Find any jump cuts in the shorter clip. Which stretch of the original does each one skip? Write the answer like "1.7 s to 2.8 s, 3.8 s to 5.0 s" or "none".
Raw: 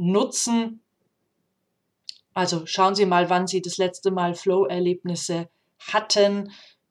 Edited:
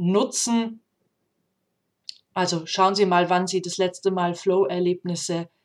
none